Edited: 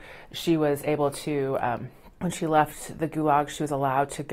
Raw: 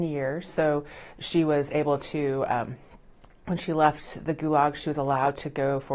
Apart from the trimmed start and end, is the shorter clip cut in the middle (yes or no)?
yes